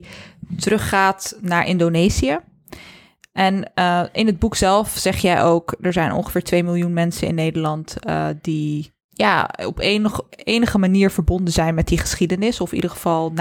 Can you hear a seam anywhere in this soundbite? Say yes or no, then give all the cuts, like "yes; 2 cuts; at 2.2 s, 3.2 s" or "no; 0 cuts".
yes; 1 cut; at 9.0 s